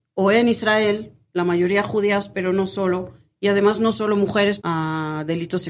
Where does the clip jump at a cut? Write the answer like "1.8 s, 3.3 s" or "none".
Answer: 4.6 s